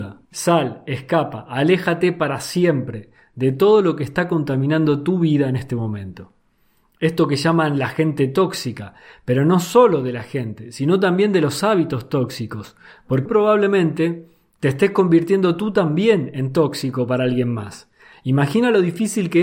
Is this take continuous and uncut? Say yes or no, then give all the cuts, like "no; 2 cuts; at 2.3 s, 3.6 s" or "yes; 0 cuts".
no; 1 cut; at 13.3 s